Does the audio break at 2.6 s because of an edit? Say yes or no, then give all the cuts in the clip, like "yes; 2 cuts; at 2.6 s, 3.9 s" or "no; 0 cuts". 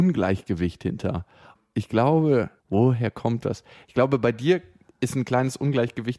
yes; 1 cut; at 2.6 s